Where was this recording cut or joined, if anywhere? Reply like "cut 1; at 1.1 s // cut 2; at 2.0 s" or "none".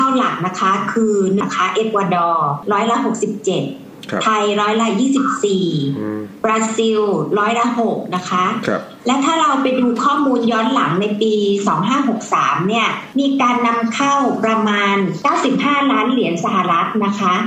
cut 1; at 1.4 s